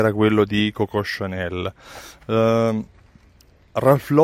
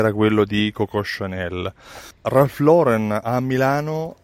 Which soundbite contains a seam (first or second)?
second